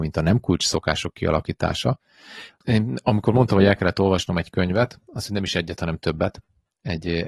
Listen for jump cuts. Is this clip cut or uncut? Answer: cut